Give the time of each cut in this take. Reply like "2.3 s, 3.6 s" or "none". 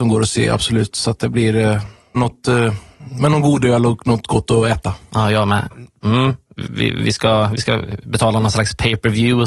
2.2 s, 5.7 s